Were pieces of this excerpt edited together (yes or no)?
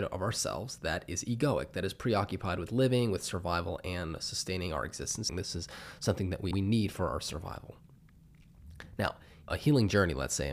yes